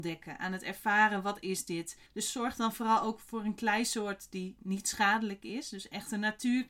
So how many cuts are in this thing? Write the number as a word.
one